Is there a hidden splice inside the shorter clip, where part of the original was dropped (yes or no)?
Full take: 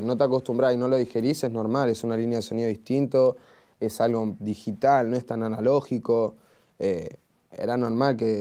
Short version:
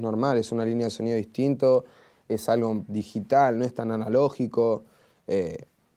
no